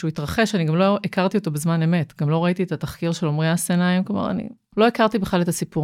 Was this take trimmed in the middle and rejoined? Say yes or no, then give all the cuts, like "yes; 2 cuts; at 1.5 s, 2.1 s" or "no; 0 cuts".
yes; 1 cut; at 4.7 s